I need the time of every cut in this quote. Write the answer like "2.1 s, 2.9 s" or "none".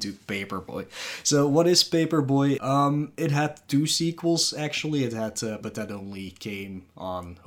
2.6 s, 5.6 s